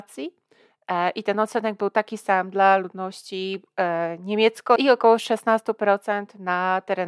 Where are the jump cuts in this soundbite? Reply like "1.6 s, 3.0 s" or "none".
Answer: 4.8 s